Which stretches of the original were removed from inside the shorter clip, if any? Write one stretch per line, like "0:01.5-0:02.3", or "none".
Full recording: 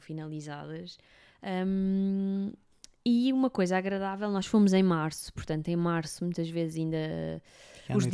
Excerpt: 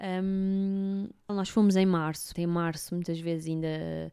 0:02.7-0:04.3
0:05.3-0:05.6